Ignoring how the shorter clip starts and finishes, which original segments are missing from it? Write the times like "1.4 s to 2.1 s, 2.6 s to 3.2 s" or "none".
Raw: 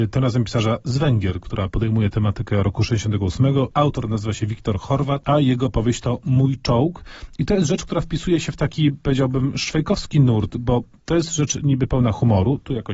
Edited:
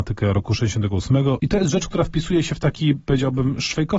3.7 s to 7.4 s